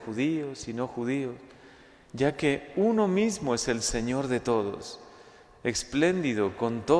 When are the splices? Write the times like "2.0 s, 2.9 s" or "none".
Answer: none